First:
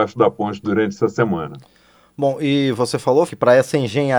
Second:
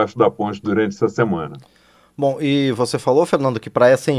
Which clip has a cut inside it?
first; 1 cut; at 3.3 s

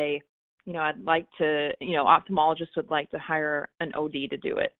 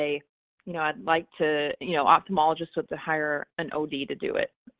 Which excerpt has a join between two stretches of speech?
second; 1 cut; at 2.9 s

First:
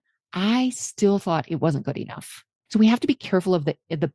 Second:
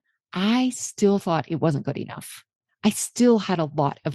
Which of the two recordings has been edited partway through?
first; 1 cut; at 2.7 s

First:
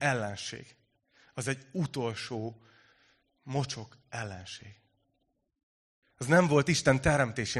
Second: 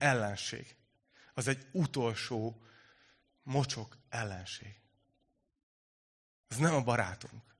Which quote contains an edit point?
first; 1 cut; at 6.0 s

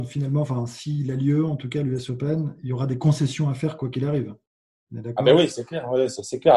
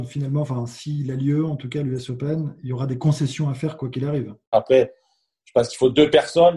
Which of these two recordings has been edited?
second; 1 cut; at 4.5 s

